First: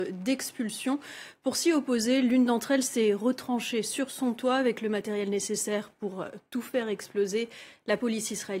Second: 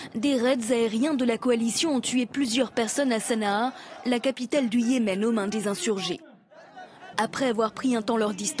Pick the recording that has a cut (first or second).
second